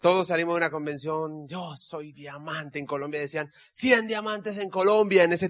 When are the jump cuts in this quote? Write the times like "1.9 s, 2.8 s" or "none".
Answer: none